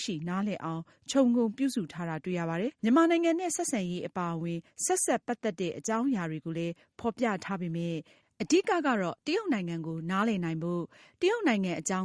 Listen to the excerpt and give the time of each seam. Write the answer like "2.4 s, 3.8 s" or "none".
2.8 s